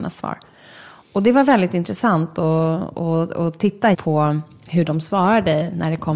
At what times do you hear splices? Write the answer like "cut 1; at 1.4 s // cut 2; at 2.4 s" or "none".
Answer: cut 1; at 3.9 s